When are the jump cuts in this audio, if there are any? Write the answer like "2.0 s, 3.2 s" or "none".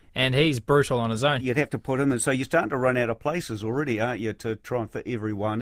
1.4 s